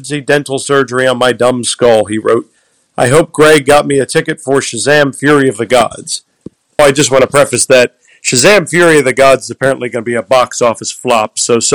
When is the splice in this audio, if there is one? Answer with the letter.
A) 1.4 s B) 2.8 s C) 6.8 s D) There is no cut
C